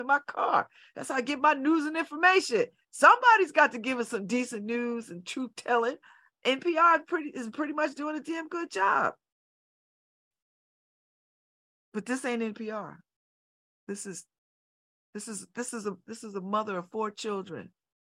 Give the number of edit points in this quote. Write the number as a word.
zero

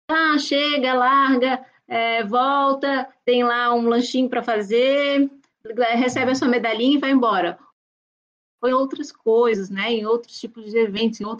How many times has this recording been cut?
zero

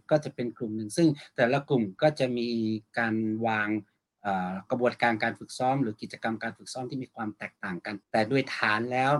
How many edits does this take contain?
one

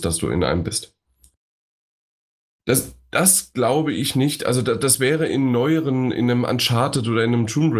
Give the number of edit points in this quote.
zero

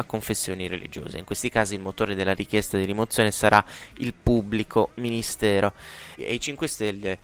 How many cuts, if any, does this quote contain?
one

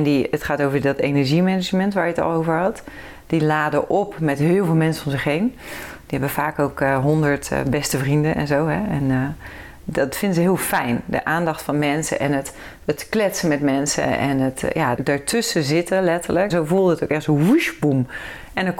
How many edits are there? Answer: two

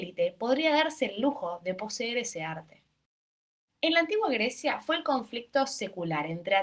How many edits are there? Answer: one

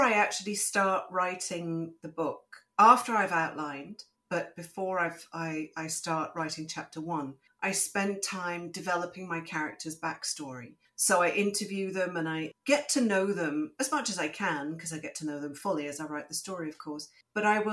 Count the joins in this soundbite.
zero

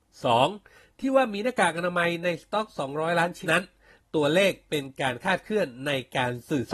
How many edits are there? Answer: one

